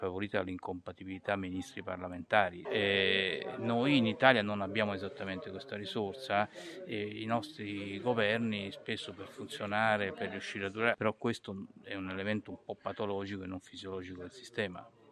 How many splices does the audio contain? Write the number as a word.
two